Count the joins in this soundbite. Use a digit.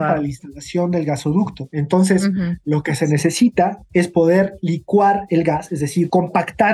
1